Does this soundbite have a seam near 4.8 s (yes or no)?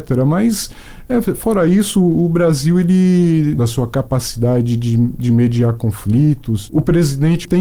no